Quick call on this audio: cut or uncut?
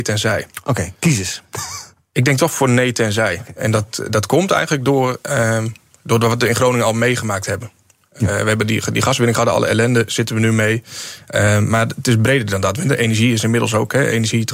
uncut